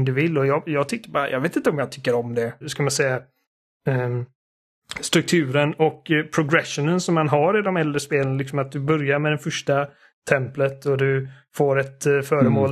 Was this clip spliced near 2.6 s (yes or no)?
yes